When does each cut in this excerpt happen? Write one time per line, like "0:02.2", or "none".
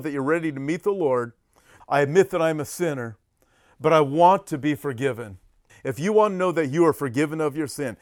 0:01.8
0:05.7

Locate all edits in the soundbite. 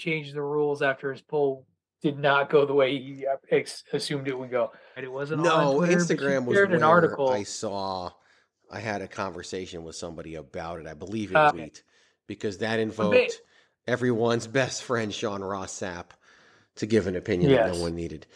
0:05.0
0:11.5

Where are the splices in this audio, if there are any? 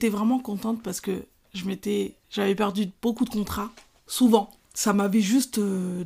0:02.2
0:04.6

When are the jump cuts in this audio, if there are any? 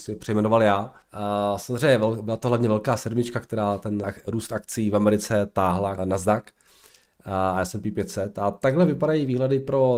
0:01.0
0:04.0
0:06.0

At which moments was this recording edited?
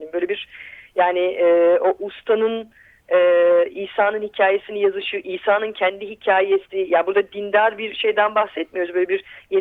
none

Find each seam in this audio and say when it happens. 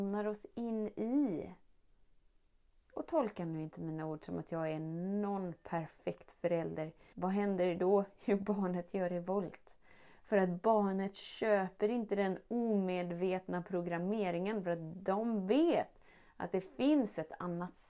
0:07.1

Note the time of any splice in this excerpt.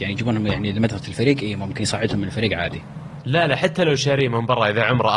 none

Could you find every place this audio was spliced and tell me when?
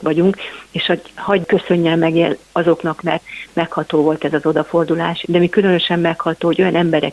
0:03.0
0:05.2

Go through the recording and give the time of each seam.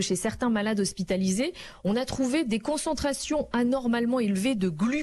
none

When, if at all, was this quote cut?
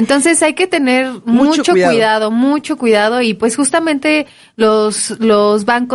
none

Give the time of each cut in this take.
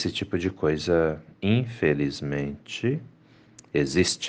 none

